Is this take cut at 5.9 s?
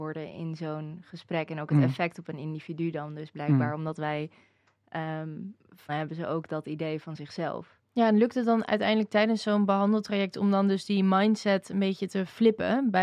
yes; 2 cuts; at 5.9 s, 7.8 s

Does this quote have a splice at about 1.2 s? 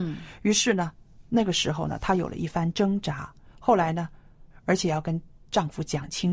no; 1 cut; at 4.5 s

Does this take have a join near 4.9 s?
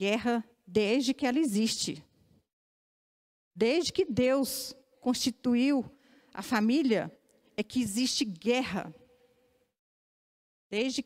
yes; 1 cut; at 4.9 s

